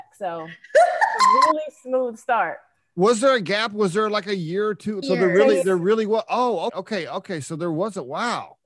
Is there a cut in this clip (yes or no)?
yes